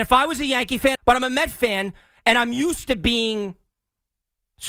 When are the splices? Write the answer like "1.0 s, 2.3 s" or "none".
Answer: 1.0 s